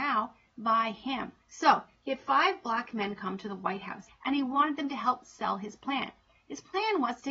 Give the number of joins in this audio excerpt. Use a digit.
2